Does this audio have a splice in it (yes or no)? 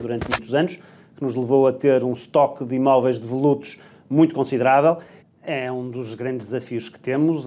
yes